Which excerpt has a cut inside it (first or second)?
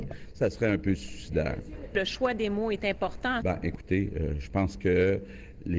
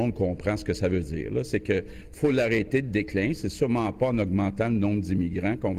first